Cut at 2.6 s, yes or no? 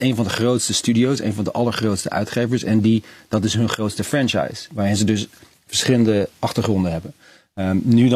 no